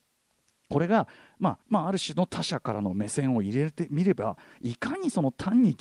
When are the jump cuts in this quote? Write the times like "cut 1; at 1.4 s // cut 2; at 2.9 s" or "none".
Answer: cut 1; at 1.6 s